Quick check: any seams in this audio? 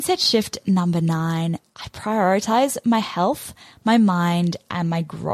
no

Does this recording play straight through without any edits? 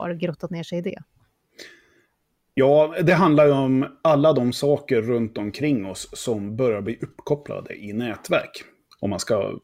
yes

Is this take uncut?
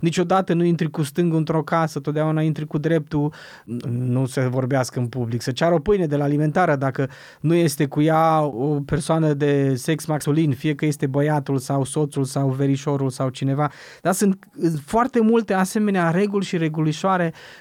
no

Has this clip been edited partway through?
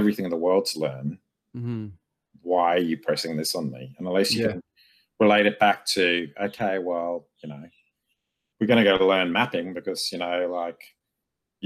no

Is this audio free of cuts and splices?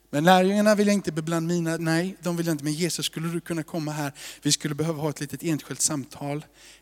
no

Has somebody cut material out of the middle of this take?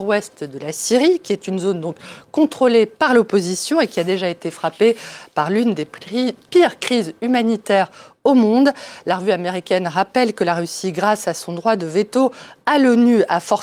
no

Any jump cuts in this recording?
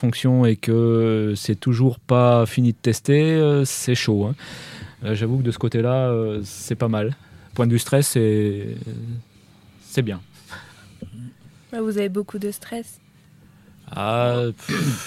no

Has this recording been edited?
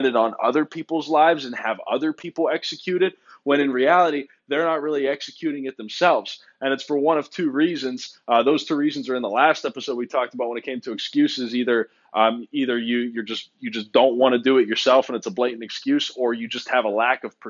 no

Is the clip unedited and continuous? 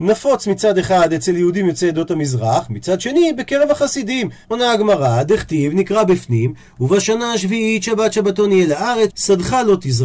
no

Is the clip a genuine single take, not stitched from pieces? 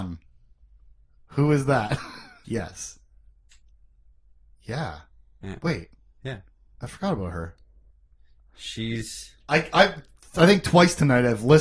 no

